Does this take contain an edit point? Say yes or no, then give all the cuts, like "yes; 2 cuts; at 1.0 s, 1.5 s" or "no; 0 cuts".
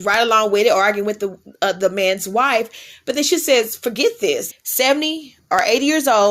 yes; 1 cut; at 4.5 s